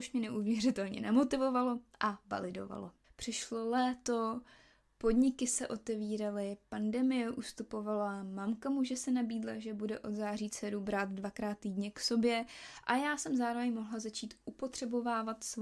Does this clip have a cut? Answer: yes; 1 cut; at 3.0 s

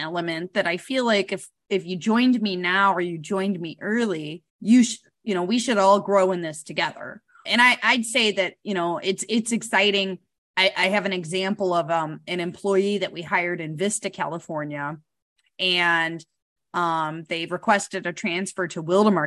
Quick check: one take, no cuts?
no; 2 cuts; at 4.5 s, 7.5 s

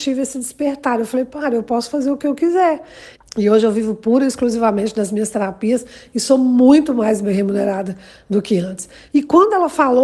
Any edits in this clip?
yes; 2 cuts; at 3.1 s, 9.1 s

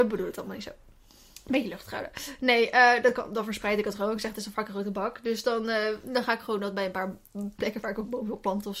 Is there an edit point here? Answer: no; 0 cuts

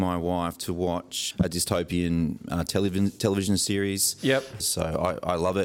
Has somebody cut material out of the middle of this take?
yes; 2 cuts; at 1.3 s, 4.6 s

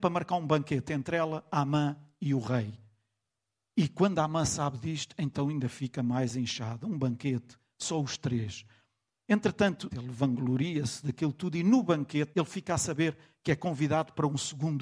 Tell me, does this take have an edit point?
yes; 2 cuts; at 9.9 s, 12.3 s

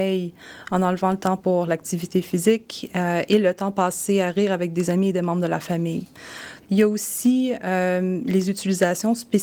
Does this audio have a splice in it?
yes; 1 cut; at 6.6 s

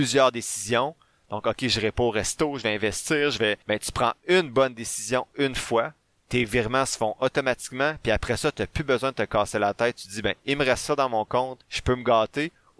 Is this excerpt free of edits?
yes; 0 cuts

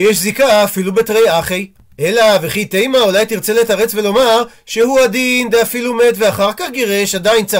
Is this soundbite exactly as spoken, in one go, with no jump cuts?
yes; 0 cuts

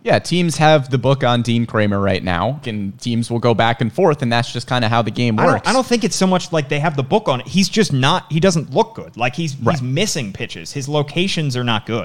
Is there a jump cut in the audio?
yes; 1 cut; at 2.6 s

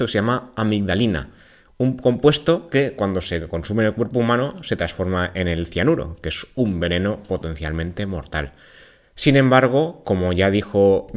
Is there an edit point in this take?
no; 0 cuts

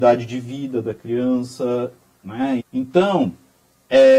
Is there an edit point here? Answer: yes; 1 cut; at 2.6 s

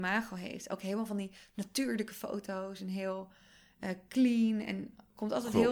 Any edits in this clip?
no; 0 cuts

